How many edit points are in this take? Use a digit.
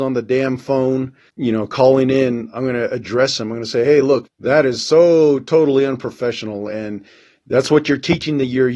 2